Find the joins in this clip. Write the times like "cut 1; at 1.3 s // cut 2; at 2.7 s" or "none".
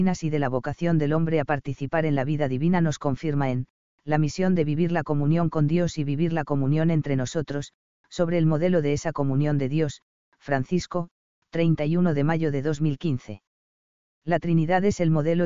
none